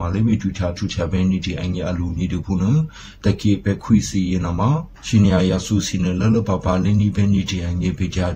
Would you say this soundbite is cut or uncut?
uncut